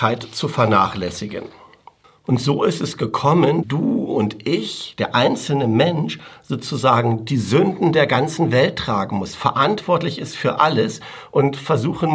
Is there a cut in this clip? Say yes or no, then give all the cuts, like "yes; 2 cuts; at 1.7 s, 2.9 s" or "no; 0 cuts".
yes; 1 cut; at 3.6 s